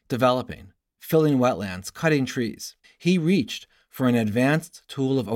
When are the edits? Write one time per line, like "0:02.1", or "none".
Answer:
0:02.8